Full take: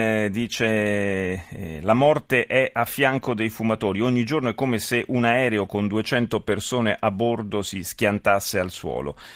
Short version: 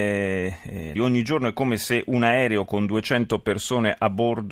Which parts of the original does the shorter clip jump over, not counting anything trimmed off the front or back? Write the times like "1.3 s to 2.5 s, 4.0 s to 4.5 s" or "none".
1.8 s to 4.0 s